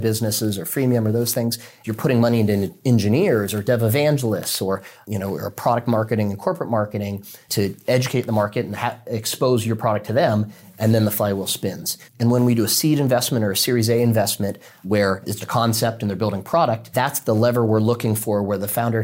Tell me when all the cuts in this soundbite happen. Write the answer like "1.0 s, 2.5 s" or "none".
12.1 s, 15.4 s